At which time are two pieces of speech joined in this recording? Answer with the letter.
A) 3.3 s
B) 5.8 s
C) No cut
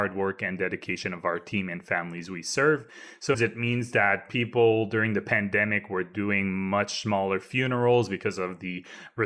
A